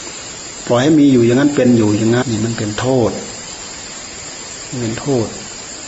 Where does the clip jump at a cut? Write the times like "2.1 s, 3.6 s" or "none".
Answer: 2.2 s